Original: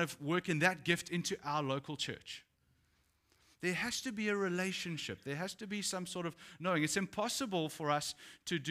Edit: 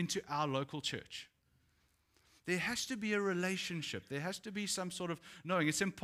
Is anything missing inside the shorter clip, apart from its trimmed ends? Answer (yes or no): no